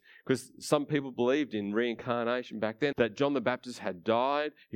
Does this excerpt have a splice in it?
yes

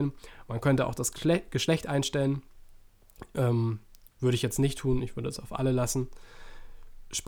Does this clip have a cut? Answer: no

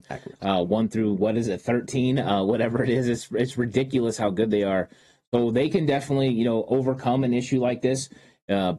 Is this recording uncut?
yes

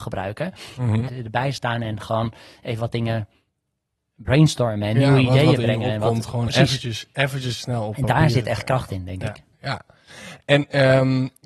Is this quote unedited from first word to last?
no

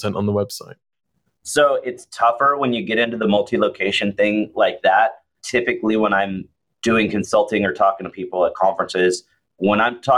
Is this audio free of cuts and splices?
no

